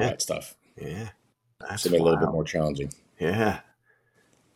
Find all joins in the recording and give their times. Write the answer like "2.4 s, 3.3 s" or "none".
1.6 s

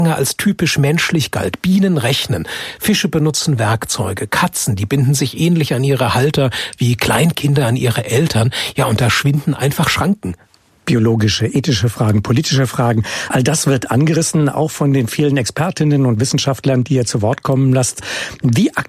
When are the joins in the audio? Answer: none

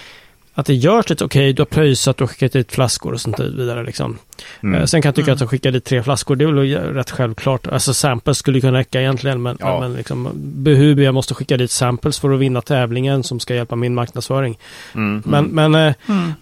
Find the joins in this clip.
11.0 s, 15.2 s

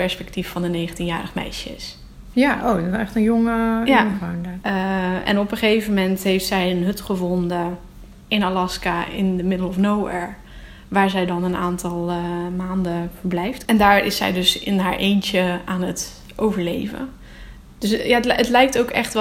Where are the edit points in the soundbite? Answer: 2.3 s, 4.6 s

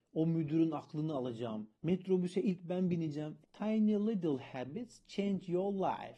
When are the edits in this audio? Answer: 1.7 s, 3.4 s

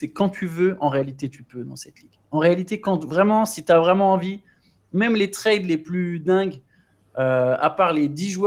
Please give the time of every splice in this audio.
none

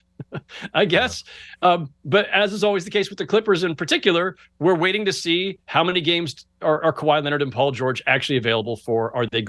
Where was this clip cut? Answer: none

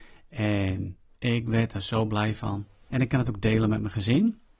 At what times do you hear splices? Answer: 2.9 s

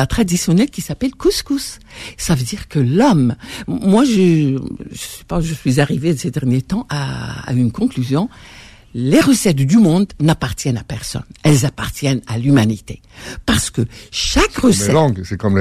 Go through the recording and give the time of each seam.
none

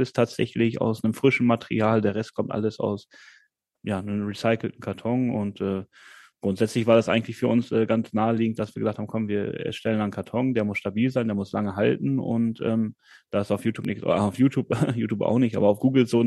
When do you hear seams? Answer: none

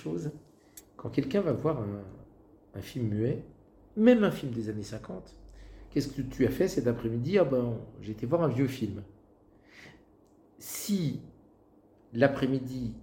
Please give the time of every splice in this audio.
none

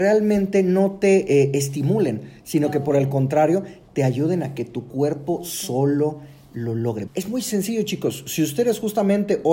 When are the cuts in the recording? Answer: 7.1 s

